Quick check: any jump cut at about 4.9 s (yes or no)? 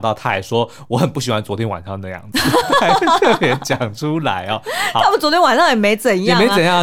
no